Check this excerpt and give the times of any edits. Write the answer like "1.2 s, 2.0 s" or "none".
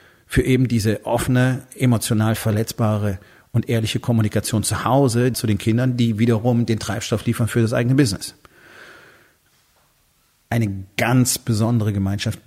5.3 s

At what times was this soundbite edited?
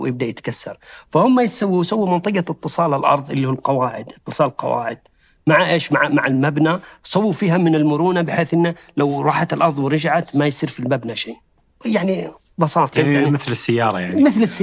12.9 s

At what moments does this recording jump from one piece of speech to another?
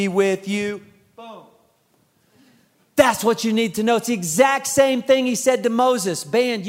none

